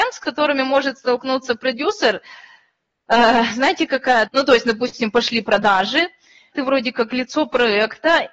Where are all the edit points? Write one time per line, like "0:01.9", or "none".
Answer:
0:04.3
0:06.5

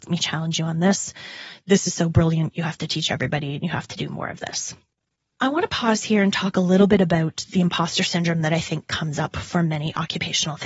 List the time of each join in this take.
none

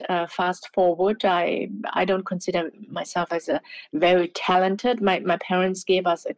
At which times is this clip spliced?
none

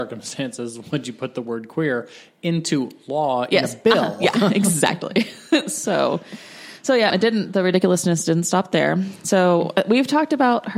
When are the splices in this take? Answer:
0:07.1

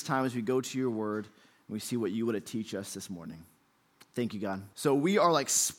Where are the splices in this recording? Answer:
0:04.7

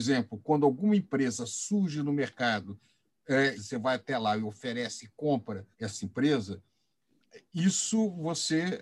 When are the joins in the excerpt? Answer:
0:03.6
0:05.7

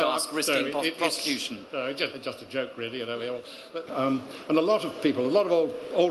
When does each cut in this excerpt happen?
0:02.1
0:03.9

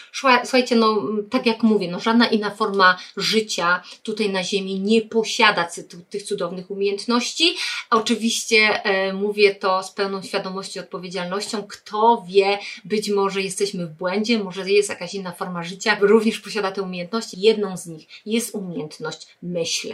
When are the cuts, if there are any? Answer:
0:16.0
0:17.3

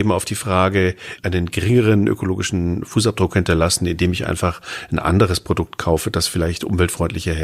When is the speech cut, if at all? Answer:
0:01.2

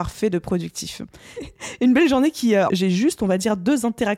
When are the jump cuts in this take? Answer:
0:01.4
0:02.7

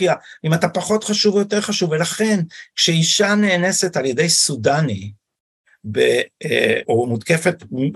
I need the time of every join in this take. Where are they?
0:06.8

